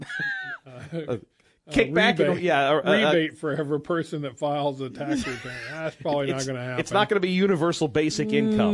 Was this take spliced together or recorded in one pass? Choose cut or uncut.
uncut